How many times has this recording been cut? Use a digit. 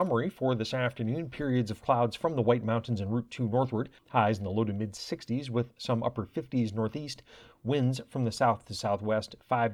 1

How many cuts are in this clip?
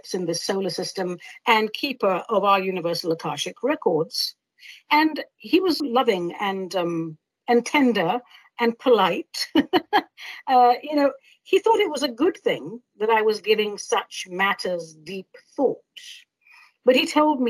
1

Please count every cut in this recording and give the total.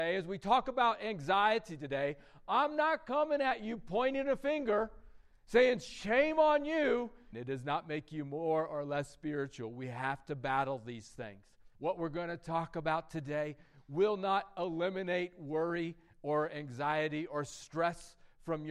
2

